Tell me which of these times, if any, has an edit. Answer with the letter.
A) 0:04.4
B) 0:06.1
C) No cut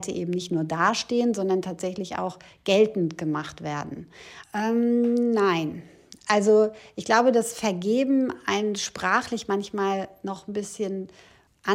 A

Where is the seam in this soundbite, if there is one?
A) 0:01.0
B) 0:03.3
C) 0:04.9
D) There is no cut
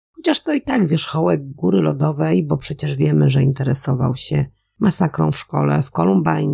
D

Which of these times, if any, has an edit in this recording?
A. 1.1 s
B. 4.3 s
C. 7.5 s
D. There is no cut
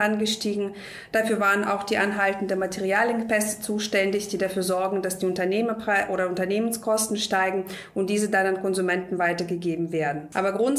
D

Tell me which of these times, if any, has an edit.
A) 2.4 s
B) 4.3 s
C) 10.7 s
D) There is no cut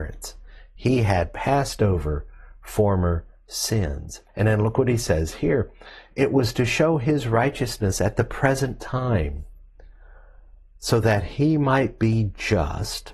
B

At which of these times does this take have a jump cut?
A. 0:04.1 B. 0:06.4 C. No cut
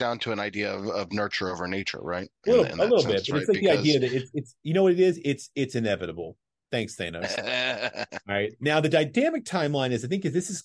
C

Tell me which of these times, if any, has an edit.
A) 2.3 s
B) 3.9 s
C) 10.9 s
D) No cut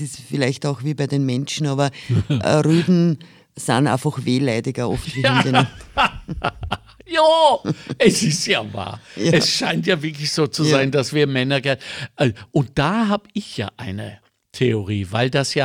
D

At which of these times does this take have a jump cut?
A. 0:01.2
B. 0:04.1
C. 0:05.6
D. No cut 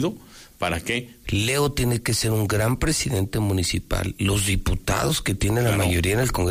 A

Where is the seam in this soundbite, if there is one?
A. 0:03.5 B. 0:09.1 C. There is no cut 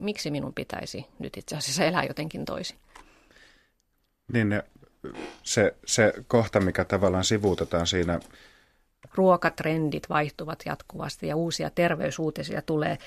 B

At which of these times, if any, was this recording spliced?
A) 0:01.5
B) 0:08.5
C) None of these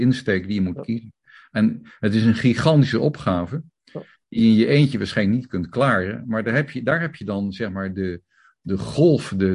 C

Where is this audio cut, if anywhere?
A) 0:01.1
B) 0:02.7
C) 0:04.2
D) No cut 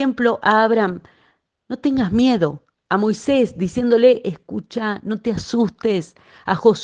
D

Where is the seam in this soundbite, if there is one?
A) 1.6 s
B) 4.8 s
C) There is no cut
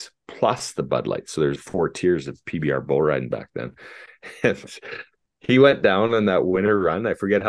A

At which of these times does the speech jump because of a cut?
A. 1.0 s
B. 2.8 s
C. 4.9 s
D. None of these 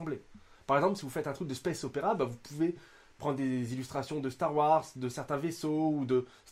D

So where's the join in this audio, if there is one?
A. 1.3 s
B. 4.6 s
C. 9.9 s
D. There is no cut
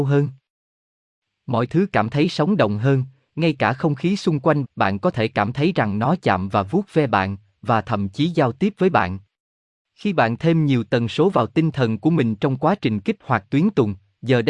B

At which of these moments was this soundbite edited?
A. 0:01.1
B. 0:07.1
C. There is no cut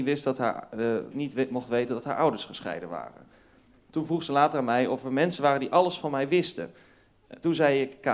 A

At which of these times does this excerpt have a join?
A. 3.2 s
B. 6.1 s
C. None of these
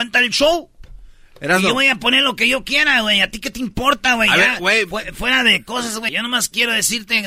B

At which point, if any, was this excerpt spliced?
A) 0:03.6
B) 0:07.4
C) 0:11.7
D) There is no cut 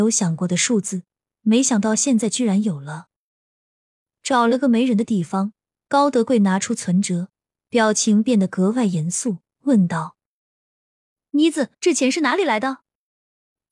C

